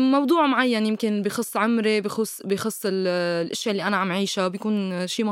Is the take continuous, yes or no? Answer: yes